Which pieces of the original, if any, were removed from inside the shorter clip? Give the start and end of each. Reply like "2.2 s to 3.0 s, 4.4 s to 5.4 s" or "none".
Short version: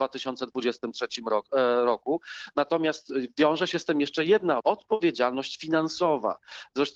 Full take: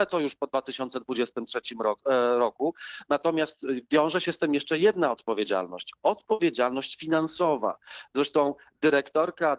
5.1 s to 6.0 s